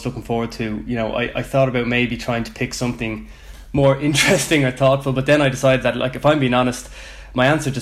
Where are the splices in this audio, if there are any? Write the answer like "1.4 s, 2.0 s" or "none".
none

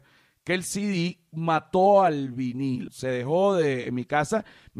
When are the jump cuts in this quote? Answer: 2.9 s

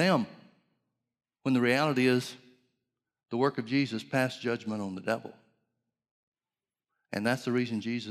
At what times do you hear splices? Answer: none

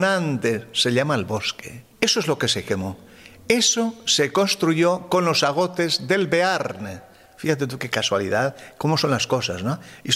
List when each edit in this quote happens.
1.9 s

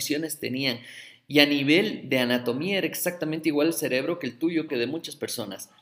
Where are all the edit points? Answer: 4.7 s

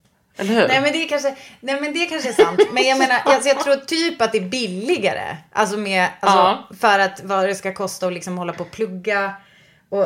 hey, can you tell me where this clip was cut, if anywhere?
none

